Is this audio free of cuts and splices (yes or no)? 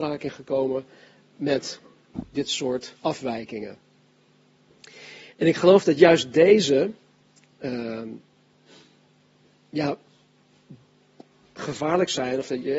yes